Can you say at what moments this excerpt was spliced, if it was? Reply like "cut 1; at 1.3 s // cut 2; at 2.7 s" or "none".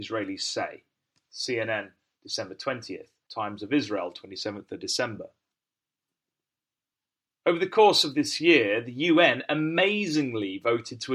cut 1; at 3.3 s

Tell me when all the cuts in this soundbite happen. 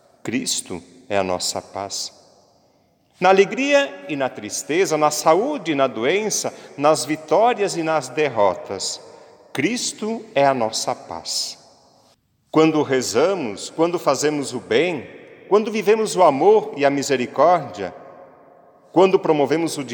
none

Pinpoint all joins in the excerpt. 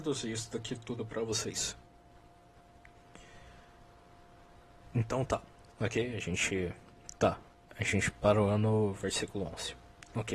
cut 1; at 5.7 s

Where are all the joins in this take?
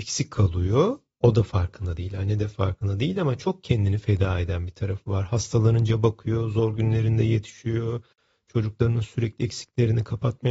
none

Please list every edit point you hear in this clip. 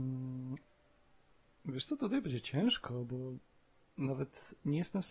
none

